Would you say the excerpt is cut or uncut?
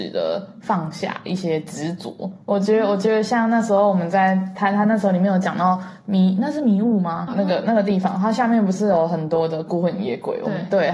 cut